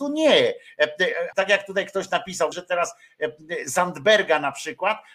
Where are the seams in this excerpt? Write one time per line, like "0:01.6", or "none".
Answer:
0:01.3
0:02.5